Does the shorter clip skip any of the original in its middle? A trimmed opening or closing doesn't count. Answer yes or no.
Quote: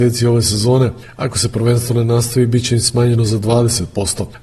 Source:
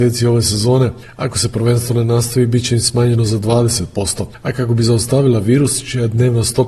no